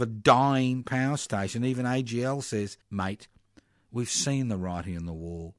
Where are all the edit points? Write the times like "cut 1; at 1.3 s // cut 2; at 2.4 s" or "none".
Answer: cut 1; at 2.8 s